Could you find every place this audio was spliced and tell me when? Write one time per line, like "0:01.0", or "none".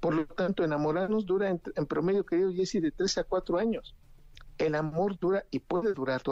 none